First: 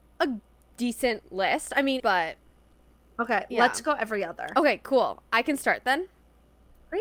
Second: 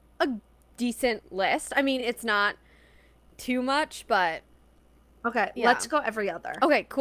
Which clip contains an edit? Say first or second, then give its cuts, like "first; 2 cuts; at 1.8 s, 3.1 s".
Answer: first; 1 cut; at 2.0 s